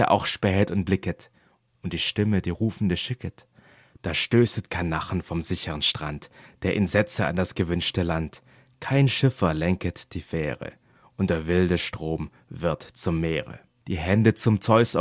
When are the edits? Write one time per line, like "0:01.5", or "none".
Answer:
0:13.8